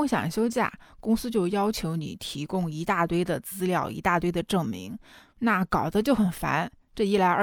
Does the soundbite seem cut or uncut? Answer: uncut